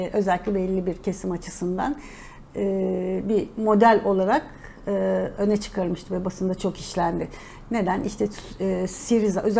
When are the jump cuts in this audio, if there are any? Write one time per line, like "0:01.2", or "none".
none